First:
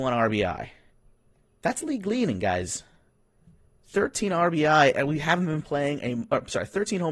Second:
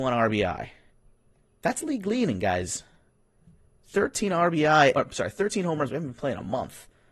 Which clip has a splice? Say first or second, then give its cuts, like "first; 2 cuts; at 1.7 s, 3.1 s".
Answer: second; 1 cut; at 4.9 s